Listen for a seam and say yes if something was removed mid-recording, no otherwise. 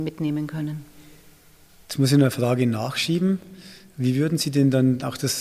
no